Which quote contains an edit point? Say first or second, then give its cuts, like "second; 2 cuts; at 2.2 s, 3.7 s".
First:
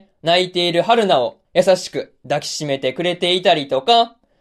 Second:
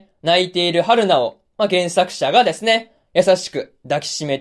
first; 1 cut; at 1.4 s